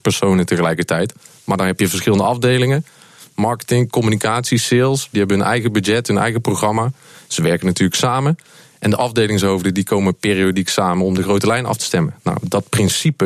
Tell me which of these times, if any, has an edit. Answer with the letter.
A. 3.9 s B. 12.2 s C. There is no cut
C